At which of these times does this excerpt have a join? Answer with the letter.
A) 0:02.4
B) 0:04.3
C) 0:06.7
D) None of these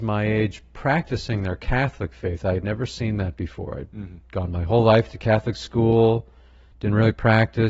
D